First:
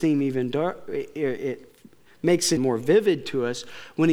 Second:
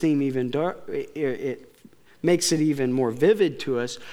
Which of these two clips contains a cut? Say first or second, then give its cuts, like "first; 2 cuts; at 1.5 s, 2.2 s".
first; 1 cut; at 2.6 s